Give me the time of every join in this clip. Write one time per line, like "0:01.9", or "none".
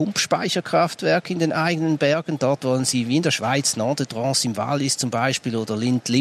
none